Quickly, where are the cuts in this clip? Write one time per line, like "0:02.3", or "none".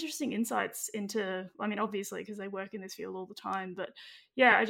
none